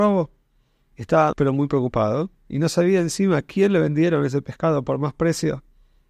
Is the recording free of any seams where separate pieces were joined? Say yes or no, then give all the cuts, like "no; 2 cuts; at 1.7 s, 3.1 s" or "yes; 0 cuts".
no; 1 cut; at 1.3 s